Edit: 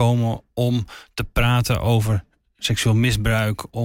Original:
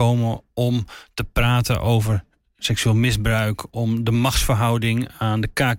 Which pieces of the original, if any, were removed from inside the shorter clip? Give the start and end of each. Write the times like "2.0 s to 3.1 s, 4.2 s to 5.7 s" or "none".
none